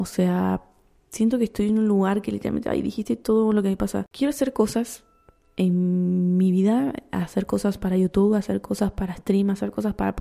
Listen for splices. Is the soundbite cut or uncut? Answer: uncut